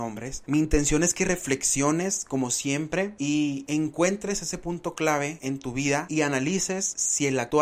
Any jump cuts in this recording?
no; 0 cuts

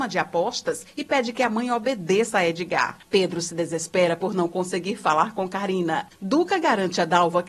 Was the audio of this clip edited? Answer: yes; 2 cuts; at 3.0 s, 6.1 s

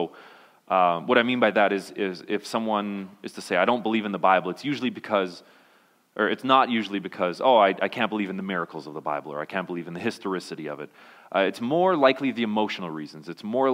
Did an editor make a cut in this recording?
no; 0 cuts

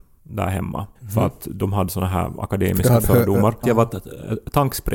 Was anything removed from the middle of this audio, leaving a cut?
yes; 2 cuts; at 1.0 s, 3.6 s

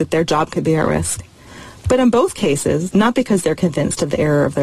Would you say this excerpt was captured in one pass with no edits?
no; 1 cut; at 2.9 s

